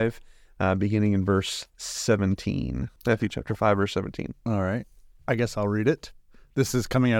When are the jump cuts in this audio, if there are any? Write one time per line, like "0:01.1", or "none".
0:03.0